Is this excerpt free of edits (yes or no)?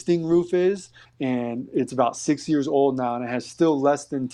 no